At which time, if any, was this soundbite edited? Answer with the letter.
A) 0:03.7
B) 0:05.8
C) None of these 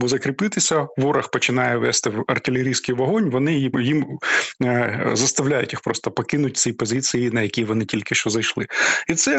A